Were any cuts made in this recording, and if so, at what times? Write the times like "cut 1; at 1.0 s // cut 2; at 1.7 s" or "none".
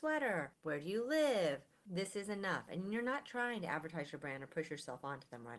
cut 1; at 1.8 s